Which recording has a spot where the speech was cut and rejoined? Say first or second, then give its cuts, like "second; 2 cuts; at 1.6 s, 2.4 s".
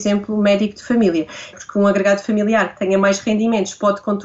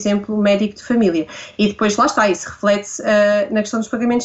first; 1 cut; at 1.5 s